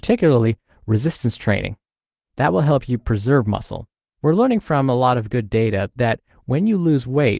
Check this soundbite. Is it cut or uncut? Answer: cut